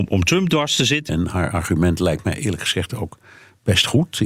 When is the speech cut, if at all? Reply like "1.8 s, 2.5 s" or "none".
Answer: 1.1 s